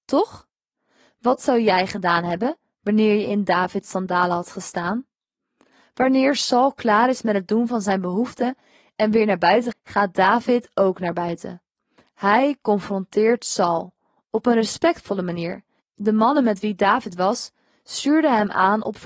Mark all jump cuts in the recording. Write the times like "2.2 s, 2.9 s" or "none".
9.7 s, 15.8 s